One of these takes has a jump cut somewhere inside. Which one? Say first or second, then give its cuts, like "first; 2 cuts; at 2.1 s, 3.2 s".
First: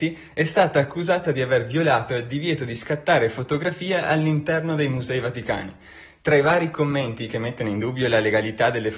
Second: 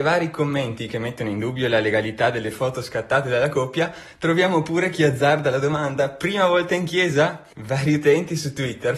second; 1 cut; at 7.5 s